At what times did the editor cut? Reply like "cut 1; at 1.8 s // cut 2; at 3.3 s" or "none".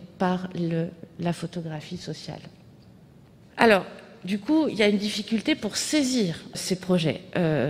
cut 1; at 3.4 s // cut 2; at 6.5 s